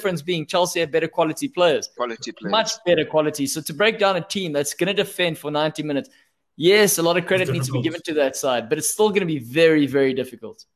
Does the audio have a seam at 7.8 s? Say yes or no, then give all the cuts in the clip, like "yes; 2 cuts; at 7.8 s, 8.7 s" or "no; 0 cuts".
no; 1 cut; at 2.0 s